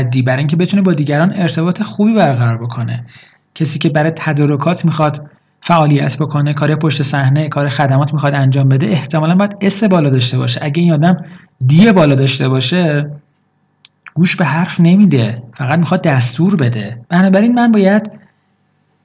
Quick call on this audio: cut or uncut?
cut